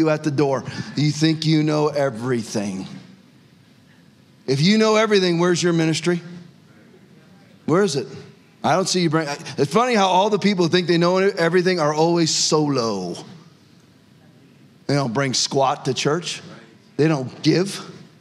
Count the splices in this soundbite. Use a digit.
0